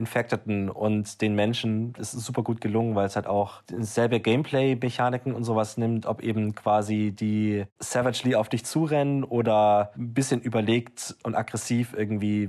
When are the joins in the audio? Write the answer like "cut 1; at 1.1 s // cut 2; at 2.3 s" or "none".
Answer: cut 1; at 2.0 s // cut 2; at 6.0 s // cut 3; at 7.8 s